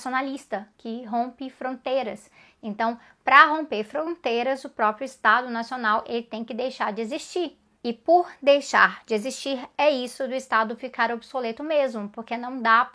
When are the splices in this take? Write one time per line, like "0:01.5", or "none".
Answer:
none